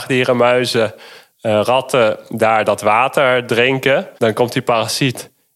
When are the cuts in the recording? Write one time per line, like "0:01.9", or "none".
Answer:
0:04.2